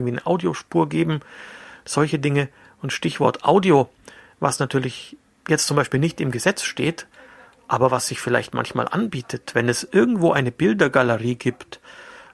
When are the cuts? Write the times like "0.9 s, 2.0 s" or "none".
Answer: none